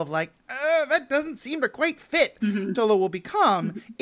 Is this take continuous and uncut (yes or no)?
no